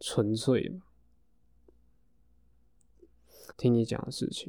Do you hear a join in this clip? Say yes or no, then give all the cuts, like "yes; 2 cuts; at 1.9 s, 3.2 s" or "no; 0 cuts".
yes; 1 cut; at 3.5 s